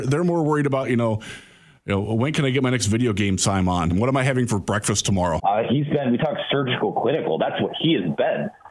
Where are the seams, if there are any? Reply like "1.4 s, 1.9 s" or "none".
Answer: 3.9 s, 5.4 s